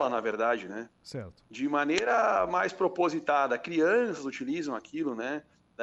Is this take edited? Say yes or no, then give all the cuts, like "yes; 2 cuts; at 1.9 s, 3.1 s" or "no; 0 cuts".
no; 0 cuts